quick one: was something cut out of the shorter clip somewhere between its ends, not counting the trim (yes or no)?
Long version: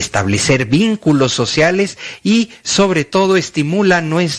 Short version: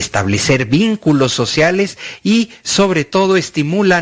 no